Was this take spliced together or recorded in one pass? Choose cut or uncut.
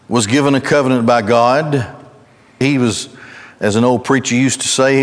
cut